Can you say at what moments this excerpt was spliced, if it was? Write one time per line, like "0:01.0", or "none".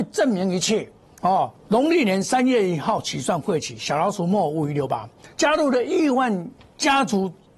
0:01.5
0:05.2